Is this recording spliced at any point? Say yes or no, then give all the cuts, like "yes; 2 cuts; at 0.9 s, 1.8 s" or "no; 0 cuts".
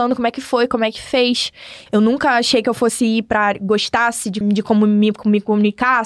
yes; 2 cuts; at 1.9 s, 4.4 s